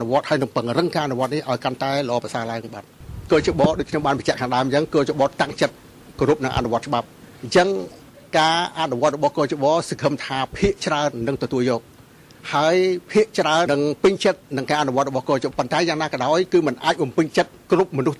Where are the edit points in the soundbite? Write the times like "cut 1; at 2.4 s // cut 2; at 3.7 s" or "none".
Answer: cut 1; at 13.7 s // cut 2; at 15.5 s